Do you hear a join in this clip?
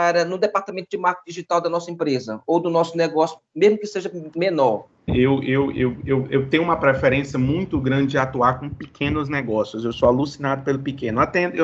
yes; 1 cut; at 5.1 s

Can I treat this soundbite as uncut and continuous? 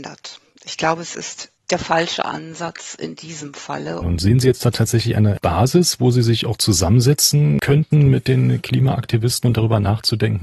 no; 1 cut; at 4.0 s

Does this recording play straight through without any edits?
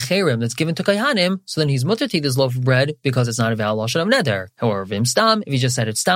yes; 0 cuts

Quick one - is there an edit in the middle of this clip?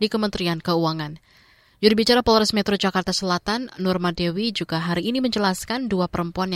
no; 0 cuts

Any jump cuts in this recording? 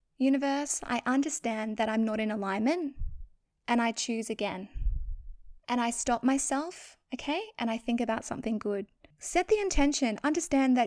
yes; 1 cut; at 9.1 s

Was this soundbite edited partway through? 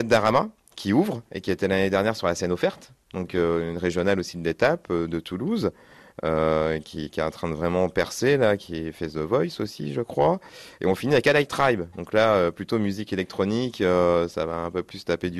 no; 0 cuts

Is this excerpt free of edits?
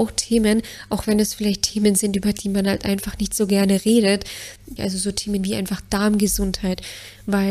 no; 1 cut; at 4.8 s

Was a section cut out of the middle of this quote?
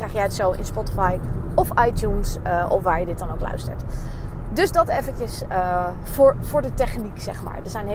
no; 0 cuts

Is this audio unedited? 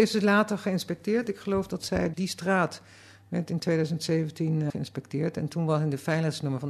no; 2 cuts; at 2.1 s, 4.7 s

